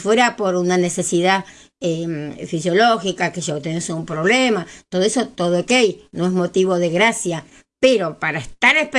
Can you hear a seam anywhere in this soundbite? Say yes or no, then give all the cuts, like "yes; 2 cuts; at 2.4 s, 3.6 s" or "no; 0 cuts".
no; 0 cuts